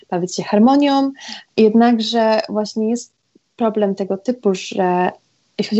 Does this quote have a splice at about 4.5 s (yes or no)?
no